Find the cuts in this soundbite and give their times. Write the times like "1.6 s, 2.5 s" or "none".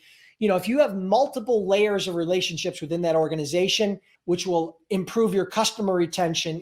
4.1 s